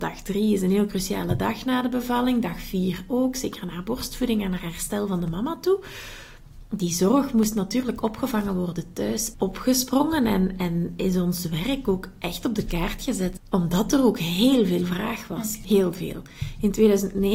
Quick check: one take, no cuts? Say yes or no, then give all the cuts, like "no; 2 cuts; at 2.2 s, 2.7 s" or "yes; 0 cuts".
no; 3 cuts; at 9.3 s, 13.4 s, 15.6 s